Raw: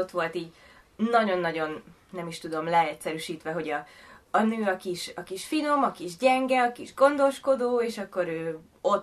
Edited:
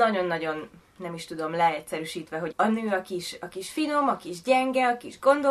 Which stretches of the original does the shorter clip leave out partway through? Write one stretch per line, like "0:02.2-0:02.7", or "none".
0:03.6-0:04.3